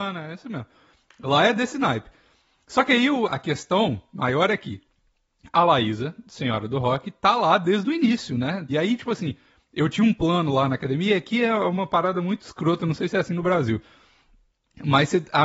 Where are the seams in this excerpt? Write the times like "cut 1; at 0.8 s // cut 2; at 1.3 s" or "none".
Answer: cut 1; at 3.3 s // cut 2; at 8.7 s

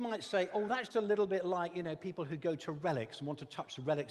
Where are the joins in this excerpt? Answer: cut 1; at 0.9 s

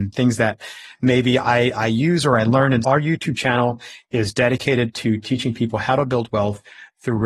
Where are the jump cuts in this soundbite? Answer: cut 1; at 2.8 s

